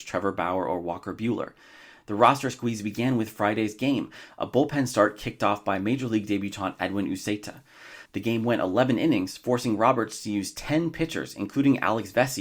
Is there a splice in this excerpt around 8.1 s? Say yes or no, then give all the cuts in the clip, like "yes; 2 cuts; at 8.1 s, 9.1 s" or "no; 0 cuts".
yes; 1 cut; at 8.1 s